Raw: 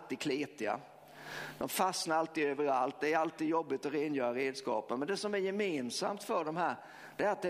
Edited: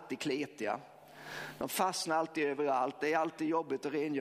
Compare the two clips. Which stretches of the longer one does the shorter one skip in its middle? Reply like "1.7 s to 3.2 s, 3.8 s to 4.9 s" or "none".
none